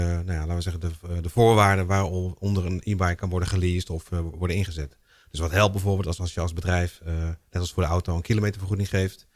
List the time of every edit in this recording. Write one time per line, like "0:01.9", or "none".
none